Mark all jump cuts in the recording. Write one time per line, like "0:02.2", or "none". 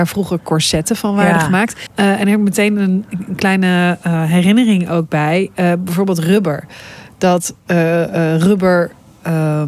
0:01.9